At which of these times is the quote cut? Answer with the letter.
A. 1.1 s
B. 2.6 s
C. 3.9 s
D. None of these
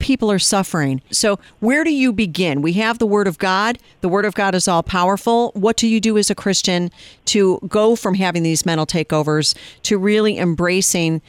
A